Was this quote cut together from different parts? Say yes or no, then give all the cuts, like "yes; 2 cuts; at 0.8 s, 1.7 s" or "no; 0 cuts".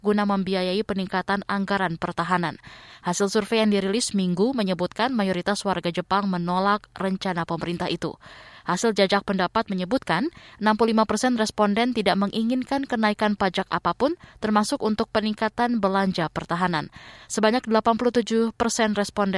no; 0 cuts